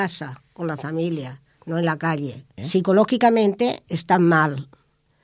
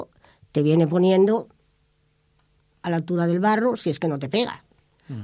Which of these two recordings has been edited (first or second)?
first